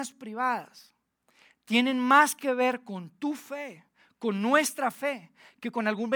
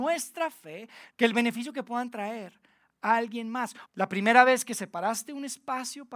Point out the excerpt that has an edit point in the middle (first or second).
second